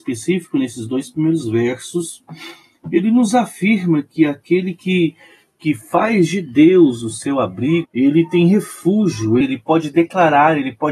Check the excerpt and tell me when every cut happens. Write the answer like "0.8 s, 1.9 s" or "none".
7.8 s, 9.4 s